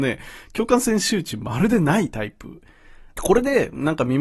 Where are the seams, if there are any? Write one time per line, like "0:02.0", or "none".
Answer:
0:03.2